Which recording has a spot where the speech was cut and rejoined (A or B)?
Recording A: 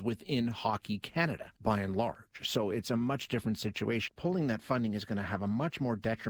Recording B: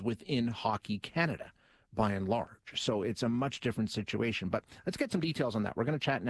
A